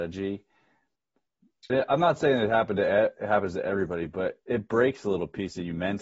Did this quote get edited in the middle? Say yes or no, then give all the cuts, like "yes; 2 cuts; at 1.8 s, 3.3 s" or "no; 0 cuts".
yes; 1 cut; at 1.7 s